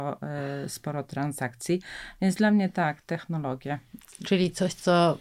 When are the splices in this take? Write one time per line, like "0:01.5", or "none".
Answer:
none